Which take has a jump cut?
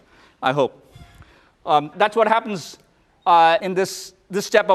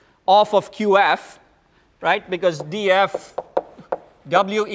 first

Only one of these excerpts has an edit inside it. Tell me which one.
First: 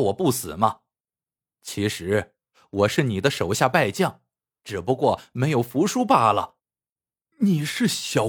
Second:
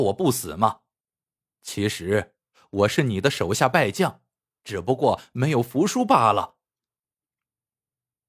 first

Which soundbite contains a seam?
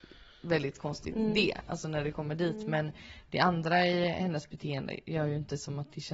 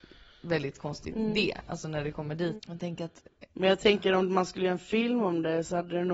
second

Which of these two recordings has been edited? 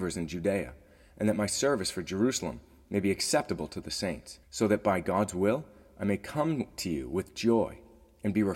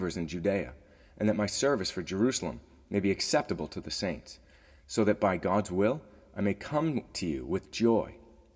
first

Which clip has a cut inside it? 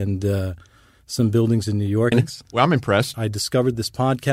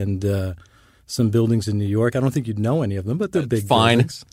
first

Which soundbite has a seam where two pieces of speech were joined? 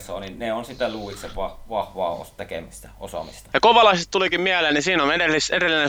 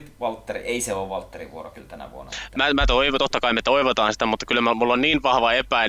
first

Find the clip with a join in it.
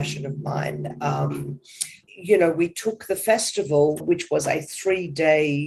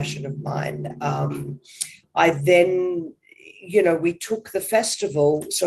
first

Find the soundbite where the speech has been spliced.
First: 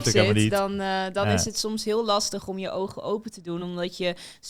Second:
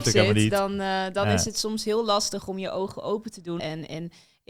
second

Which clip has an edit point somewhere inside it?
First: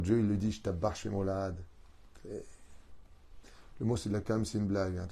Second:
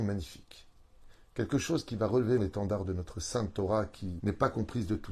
second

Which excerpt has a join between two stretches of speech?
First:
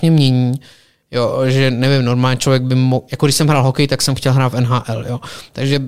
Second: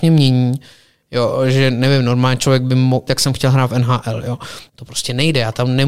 second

